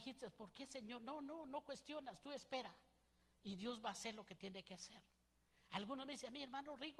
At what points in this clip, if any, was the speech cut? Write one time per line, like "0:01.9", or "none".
none